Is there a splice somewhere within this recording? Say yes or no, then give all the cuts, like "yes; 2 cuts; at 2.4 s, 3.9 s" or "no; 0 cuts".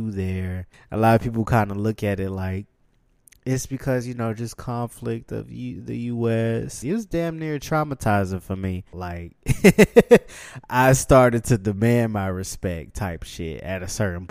yes; 2 cuts; at 6.8 s, 8.9 s